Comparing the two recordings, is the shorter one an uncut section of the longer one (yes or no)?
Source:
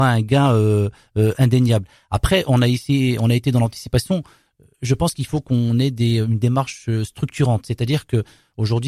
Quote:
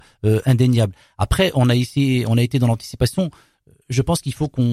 yes